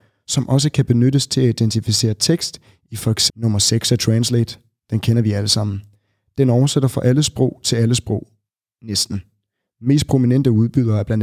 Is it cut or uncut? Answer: cut